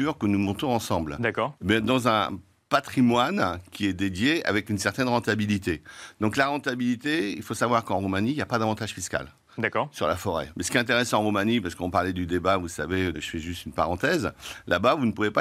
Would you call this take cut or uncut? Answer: cut